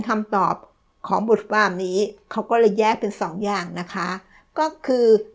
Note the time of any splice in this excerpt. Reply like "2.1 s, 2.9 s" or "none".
none